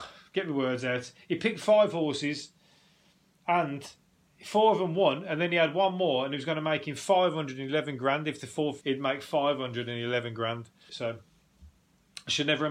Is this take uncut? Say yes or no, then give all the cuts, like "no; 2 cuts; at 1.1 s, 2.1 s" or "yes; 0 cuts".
no; 2 cuts; at 8.8 s, 10.9 s